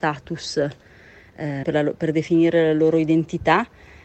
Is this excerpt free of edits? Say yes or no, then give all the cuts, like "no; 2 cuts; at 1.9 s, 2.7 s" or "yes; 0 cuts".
no; 1 cut; at 1.6 s